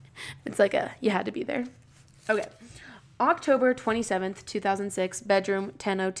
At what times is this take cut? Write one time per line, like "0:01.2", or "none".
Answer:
none